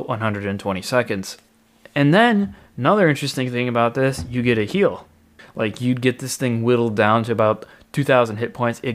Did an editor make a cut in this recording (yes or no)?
yes